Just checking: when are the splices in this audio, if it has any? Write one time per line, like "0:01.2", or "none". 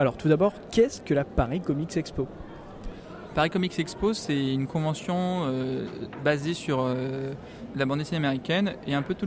0:07.7

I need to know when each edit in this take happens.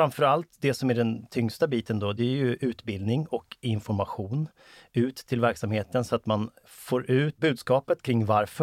none

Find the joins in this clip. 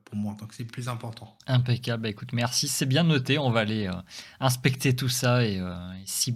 none

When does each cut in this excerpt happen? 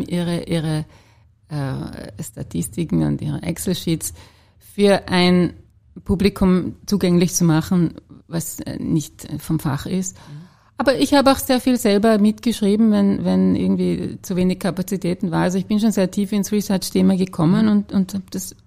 none

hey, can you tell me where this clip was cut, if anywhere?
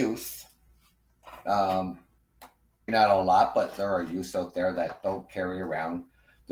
0:02.9

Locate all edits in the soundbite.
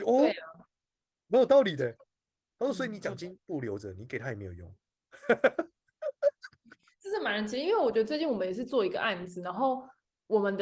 none

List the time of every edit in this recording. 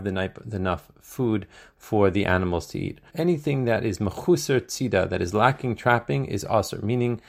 0:03.1

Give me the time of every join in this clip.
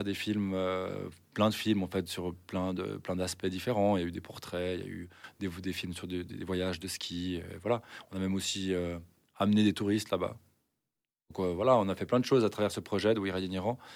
none

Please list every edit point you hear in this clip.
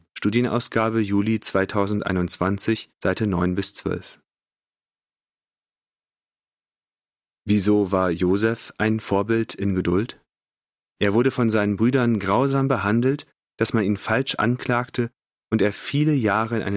0:10.8
0:13.5

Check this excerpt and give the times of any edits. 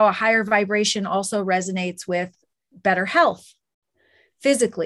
none

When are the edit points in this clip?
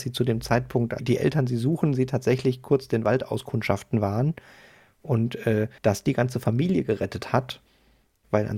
0:01.0
0:05.8

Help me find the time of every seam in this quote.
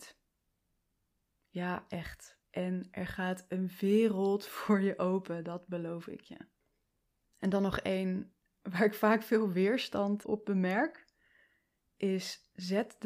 0:02.4
0:07.2
0:10.2

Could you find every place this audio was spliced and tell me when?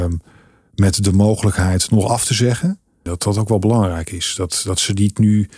0:03.1

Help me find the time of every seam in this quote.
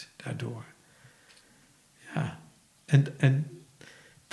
none

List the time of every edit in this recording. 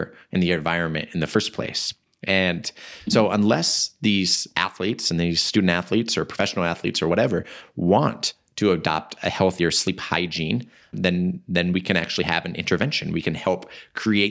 0:10.9

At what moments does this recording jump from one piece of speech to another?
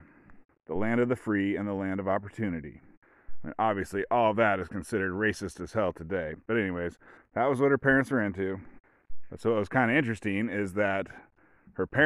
none

